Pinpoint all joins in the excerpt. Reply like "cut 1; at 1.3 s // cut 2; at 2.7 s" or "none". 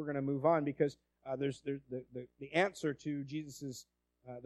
cut 1; at 1.8 s